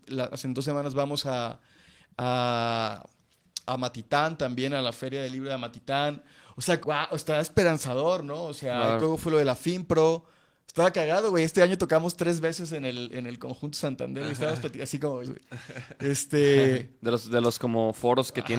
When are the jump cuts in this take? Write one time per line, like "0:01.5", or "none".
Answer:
0:06.8
0:09.0
0:15.2